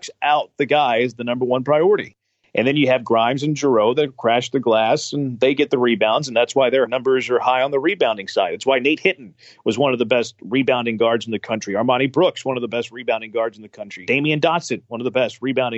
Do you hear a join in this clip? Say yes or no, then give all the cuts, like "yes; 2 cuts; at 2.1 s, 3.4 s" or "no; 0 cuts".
no; 0 cuts